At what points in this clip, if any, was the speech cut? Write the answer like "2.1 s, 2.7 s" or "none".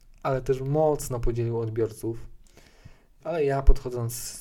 none

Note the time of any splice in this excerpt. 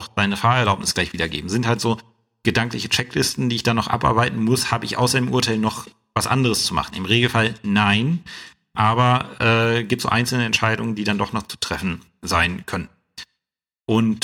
none

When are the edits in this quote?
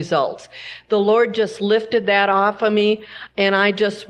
none

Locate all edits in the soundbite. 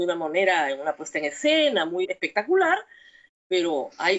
2.0 s

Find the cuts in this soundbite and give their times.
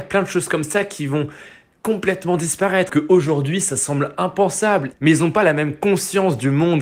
2.9 s, 4.9 s

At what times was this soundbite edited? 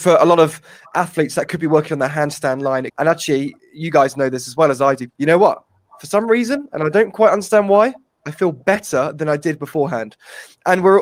2.9 s, 5.1 s

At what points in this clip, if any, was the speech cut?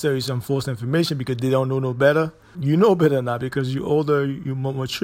2.5 s

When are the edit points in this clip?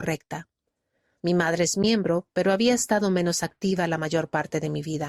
1.2 s

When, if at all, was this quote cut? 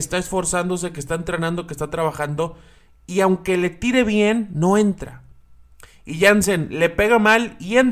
none

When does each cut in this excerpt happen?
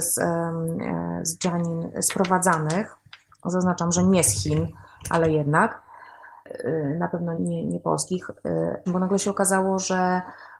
7.4 s, 8.9 s

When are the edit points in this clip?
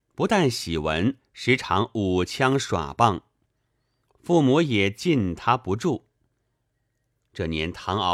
1.2 s

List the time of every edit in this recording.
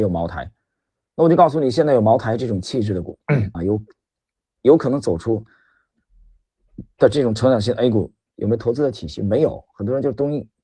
3.5 s, 8.3 s

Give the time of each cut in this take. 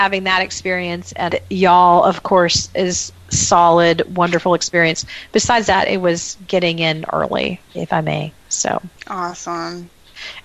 1.3 s

